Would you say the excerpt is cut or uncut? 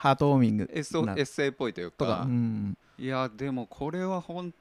cut